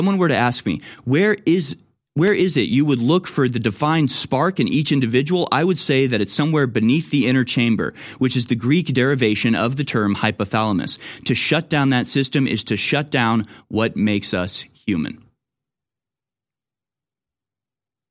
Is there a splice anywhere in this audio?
no; 0 cuts

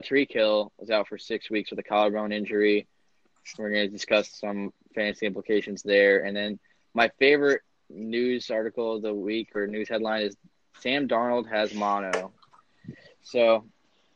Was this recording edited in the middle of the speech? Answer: no; 0 cuts

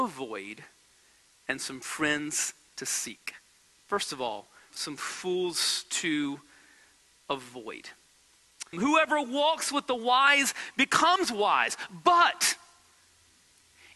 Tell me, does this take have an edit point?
yes; 2 cuts; at 4.7 s, 8.7 s

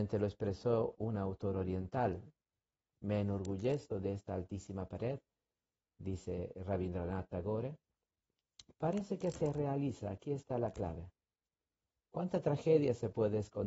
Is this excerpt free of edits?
no; 1 cut; at 8.7 s

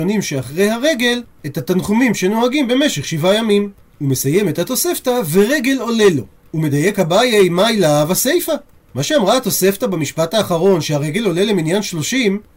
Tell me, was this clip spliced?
yes; 1 cut; at 6.4 s

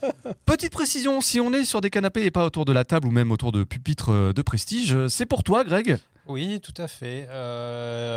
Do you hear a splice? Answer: no; 0 cuts

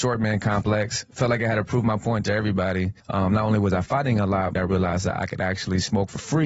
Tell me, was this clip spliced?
yes; 2 cuts; at 3.0 s, 4.5 s

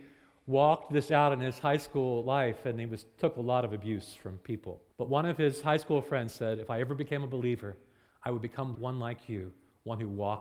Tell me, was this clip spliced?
yes; 2 cuts; at 4.9 s, 8.7 s

